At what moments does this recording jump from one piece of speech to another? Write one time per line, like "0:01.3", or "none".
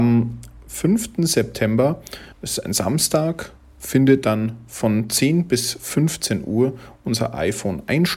0:02.3